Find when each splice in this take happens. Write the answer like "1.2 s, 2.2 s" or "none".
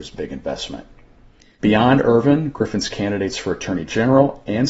1.6 s

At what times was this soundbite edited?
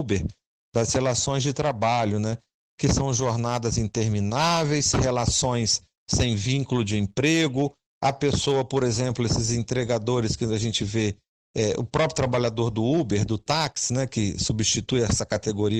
none

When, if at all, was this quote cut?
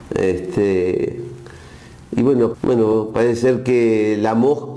2.5 s

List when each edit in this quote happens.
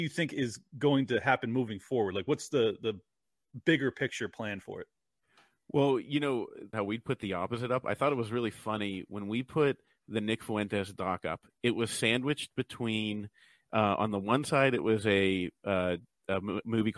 6.7 s

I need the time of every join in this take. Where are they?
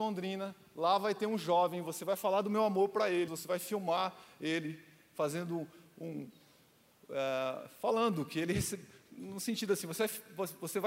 3.3 s

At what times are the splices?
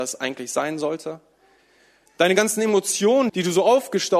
2.1 s, 3.3 s

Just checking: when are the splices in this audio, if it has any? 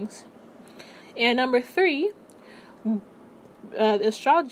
1.0 s, 2.7 s

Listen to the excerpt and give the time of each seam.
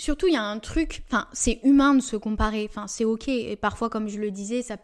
none

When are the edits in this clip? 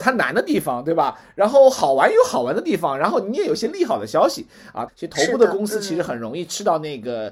4.9 s

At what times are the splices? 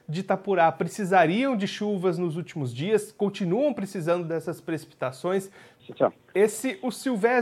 5.8 s

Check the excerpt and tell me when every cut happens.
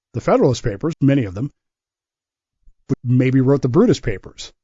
0.9 s, 2.9 s

